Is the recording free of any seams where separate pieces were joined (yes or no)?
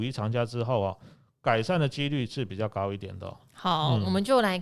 yes